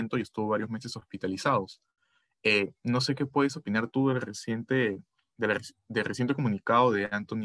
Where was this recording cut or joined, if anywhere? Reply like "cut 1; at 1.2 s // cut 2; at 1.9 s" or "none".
none